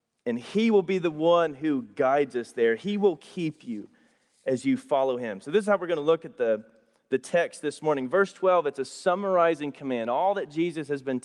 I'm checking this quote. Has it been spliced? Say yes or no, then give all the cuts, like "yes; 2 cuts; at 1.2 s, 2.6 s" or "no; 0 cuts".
no; 0 cuts